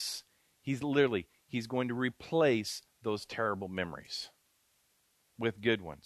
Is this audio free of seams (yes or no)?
yes